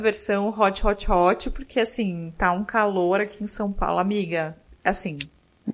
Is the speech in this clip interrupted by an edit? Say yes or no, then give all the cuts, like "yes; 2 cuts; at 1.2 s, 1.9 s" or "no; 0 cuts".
no; 0 cuts